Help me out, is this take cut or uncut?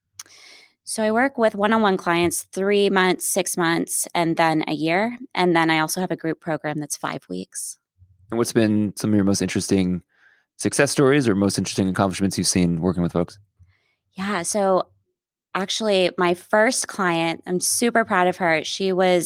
uncut